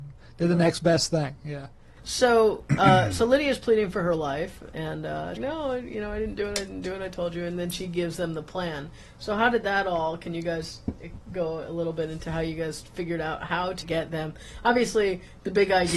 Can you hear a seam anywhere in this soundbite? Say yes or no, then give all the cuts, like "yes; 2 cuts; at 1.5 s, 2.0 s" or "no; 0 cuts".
yes; 2 cuts; at 5.4 s, 13.8 s